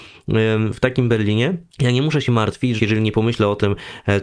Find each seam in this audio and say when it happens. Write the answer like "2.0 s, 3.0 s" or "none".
1.7 s, 2.8 s